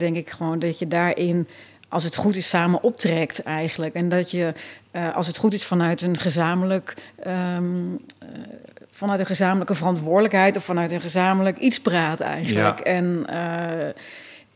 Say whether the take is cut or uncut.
uncut